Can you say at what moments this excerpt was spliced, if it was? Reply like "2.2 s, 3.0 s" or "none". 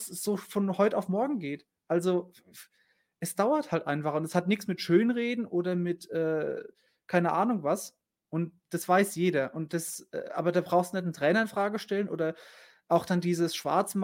8.2 s